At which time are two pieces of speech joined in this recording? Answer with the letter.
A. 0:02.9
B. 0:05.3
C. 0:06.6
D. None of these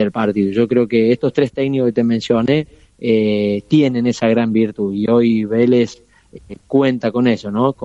D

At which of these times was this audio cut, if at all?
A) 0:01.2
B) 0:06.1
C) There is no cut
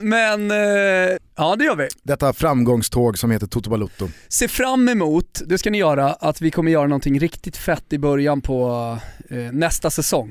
A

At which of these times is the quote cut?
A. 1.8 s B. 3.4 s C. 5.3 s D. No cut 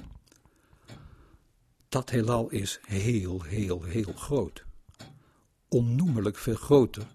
A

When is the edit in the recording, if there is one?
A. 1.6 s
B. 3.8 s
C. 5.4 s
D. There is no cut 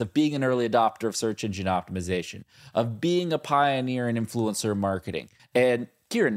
C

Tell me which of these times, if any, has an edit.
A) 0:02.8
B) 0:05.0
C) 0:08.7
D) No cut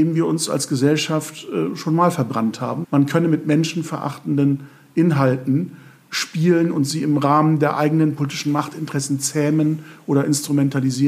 A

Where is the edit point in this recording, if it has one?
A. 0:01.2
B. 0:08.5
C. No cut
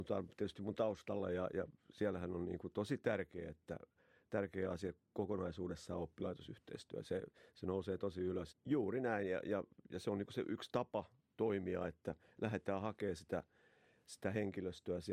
B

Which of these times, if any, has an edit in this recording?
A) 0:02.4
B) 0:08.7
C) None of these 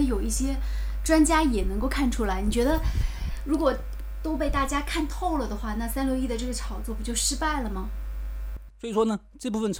B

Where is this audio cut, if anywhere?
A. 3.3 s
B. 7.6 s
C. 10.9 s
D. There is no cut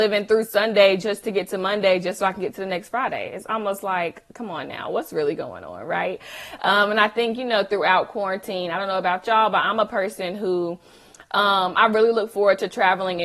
D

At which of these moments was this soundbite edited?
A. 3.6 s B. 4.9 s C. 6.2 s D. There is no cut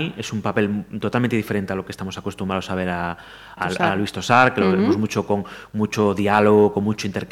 A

